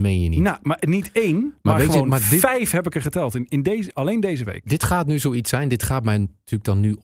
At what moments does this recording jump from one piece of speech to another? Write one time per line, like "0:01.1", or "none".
none